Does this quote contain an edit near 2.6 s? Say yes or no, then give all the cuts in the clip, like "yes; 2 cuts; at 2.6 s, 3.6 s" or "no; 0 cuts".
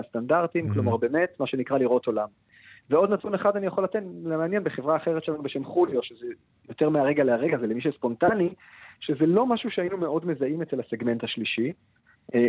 no; 0 cuts